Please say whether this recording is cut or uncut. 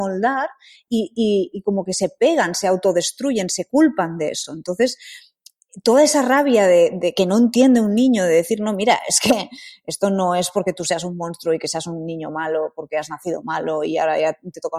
uncut